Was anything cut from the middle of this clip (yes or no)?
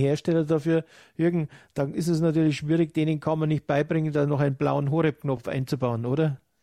no